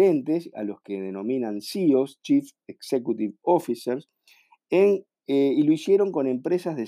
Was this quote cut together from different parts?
no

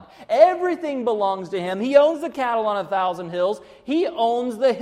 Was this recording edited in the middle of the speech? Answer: no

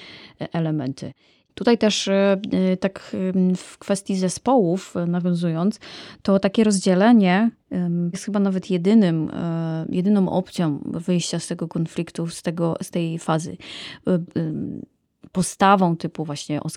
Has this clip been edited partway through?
yes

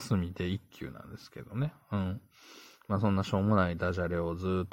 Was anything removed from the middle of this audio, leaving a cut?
no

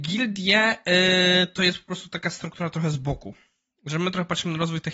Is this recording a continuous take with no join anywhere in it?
yes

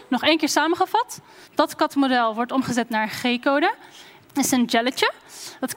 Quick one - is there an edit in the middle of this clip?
yes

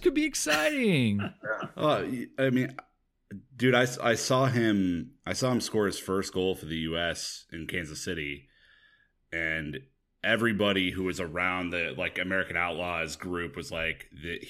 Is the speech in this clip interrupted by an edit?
no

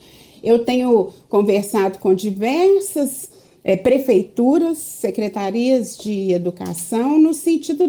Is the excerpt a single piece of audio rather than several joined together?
yes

